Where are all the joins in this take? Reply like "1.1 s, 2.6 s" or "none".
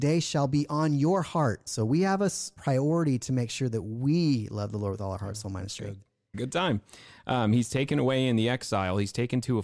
1.7 s, 6.3 s